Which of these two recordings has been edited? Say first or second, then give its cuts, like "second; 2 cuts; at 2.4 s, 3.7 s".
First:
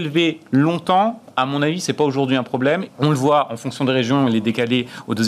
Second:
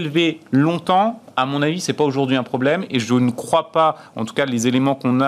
first; 1 cut; at 2.9 s